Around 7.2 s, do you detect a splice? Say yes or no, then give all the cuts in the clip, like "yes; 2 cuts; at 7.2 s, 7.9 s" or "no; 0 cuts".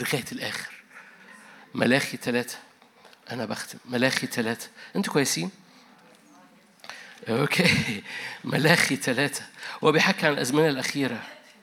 yes; 1 cut; at 7.2 s